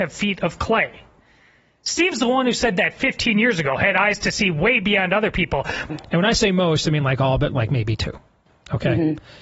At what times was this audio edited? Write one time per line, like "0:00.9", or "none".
0:05.9